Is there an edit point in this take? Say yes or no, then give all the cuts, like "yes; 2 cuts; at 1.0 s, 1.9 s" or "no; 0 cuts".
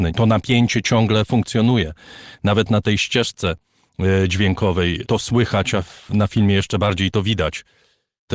no; 0 cuts